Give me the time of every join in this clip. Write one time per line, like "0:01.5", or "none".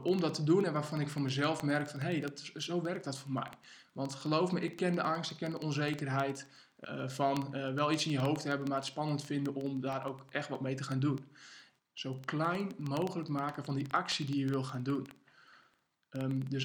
0:06.8
0:11.8